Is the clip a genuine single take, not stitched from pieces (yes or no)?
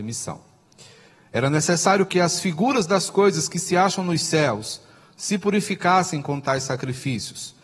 no